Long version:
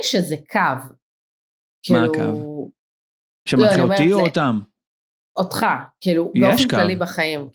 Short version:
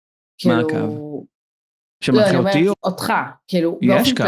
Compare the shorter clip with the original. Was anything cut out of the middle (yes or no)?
yes